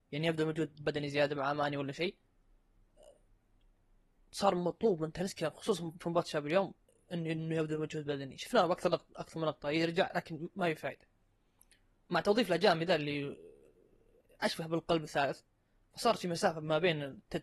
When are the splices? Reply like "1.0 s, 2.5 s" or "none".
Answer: none